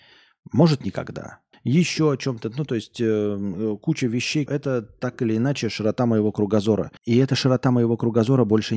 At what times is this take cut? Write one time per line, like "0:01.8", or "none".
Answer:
0:01.5
0:04.5
0:07.0